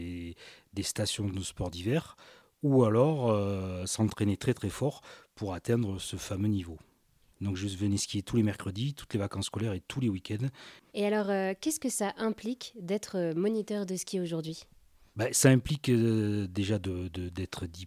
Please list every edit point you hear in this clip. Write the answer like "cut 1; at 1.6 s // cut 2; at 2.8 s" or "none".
cut 1; at 7.3 s // cut 2; at 10.8 s